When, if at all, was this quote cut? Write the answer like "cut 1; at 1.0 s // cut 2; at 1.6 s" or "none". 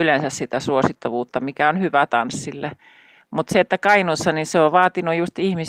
none

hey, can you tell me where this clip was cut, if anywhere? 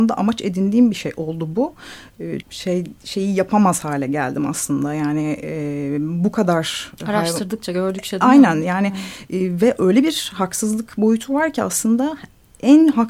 cut 1; at 2.4 s

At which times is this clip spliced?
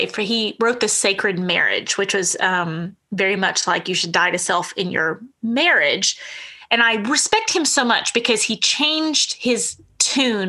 none

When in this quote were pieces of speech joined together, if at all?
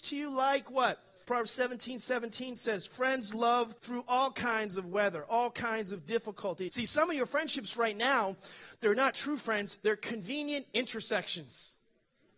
cut 1; at 1.2 s // cut 2; at 3.8 s // cut 3; at 6.7 s

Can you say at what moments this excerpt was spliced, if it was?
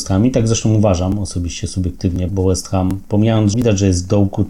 cut 1; at 2.3 s // cut 2; at 3.5 s

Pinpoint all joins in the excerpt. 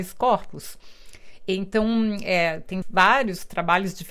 cut 1; at 2.8 s

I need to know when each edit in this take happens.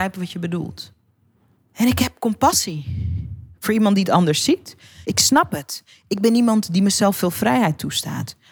cut 1; at 1.6 s // cut 2; at 5.0 s

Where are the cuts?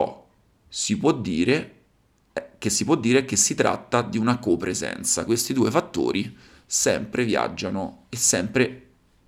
cut 1; at 5.3 s // cut 2; at 8.1 s

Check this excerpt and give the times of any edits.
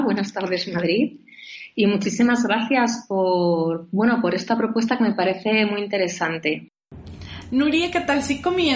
none

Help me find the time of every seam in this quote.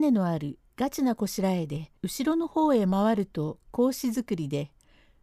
cut 1; at 2.0 s

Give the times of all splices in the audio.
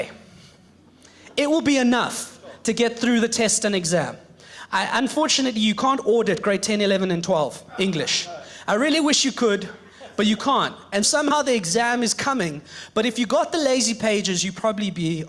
cut 1; at 11.0 s

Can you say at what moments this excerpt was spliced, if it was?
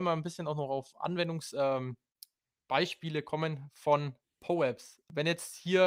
none

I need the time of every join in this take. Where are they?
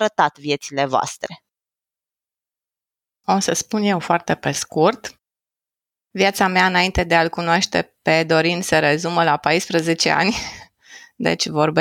none

